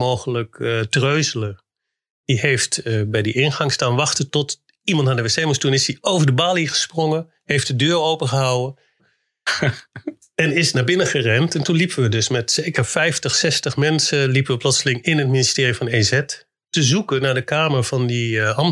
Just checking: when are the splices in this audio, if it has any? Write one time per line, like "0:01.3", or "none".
0:09.0